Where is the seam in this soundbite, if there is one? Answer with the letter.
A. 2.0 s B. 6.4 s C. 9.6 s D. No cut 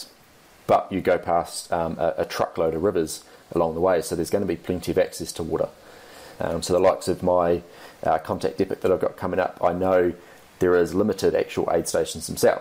B